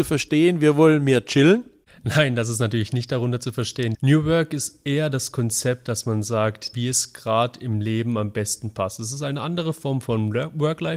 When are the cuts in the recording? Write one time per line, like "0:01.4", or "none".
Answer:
0:03.9
0:06.7